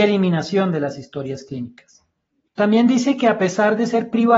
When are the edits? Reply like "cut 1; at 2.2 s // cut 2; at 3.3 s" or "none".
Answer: cut 1; at 2.5 s

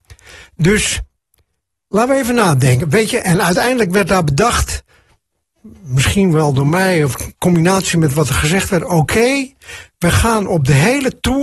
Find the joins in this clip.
none

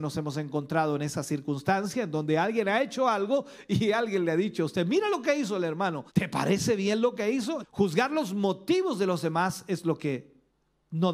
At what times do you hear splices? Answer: cut 1; at 6.1 s // cut 2; at 7.6 s

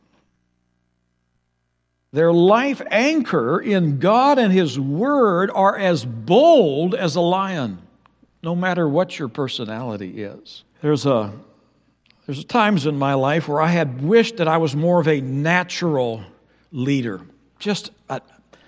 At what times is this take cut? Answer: cut 1; at 10.7 s

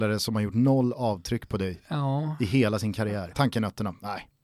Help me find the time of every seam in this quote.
cut 1; at 3.3 s

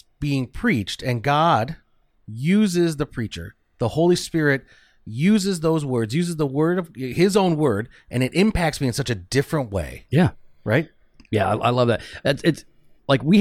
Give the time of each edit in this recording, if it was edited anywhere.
none

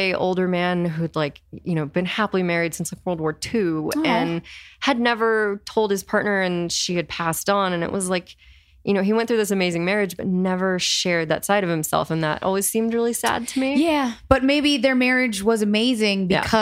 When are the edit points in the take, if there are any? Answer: none

